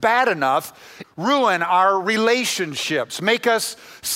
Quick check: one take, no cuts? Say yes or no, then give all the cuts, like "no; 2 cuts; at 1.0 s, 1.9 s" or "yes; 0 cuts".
no; 1 cut; at 1.0 s